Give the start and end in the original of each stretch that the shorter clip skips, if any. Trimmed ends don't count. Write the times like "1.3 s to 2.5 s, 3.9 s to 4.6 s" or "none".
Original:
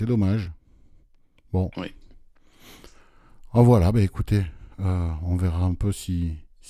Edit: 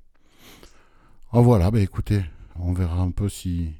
4.8 s to 5.2 s